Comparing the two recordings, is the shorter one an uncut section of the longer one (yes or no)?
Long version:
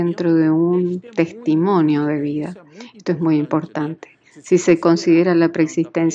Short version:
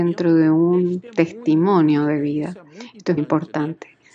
no